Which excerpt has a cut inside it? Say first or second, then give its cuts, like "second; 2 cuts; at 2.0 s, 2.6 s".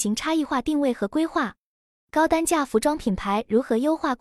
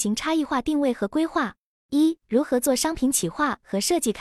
second; 1 cut; at 1.7 s